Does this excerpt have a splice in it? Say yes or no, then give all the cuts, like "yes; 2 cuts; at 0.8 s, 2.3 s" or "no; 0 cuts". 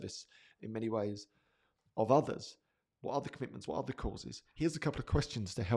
no; 0 cuts